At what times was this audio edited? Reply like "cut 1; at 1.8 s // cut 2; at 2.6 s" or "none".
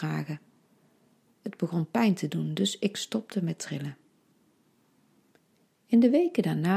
none